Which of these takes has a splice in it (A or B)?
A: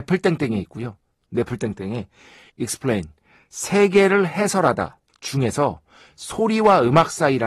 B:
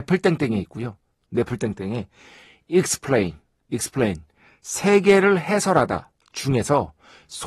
A